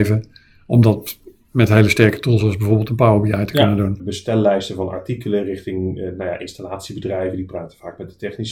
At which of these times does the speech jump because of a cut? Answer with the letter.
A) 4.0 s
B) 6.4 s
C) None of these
A